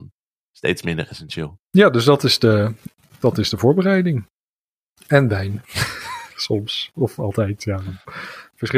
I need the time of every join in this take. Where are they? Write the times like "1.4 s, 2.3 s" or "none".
5.0 s